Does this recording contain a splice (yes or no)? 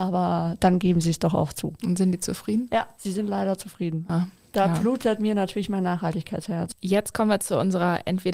no